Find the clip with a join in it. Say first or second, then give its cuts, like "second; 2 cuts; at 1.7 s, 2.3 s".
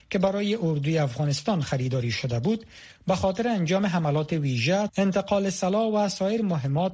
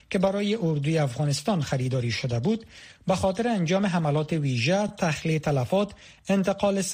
first; 1 cut; at 4.9 s